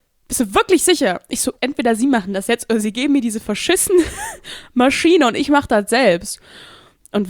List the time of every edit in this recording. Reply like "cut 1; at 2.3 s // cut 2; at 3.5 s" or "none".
cut 1; at 1.6 s

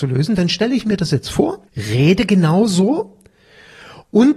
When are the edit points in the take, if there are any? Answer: cut 1; at 1.7 s

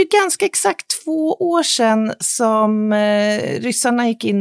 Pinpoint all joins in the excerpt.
none

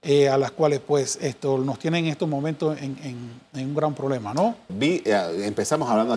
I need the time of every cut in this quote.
cut 1; at 4.7 s

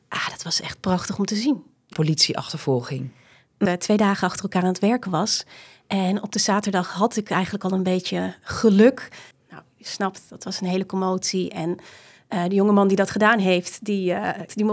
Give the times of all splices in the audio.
cut 1; at 1.9 s // cut 2; at 3.7 s // cut 3; at 9.3 s

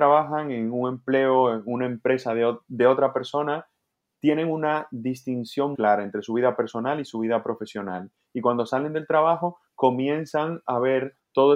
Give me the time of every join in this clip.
cut 1; at 5.7 s

